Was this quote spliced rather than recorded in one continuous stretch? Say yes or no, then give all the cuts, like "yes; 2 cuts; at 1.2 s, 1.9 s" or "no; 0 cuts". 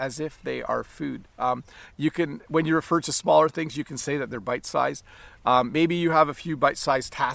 no; 0 cuts